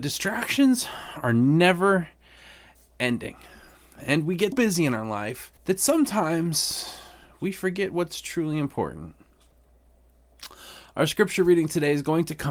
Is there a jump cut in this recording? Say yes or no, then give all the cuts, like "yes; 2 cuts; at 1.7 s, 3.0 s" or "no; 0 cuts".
yes; 2 cuts; at 4.5 s, 5.6 s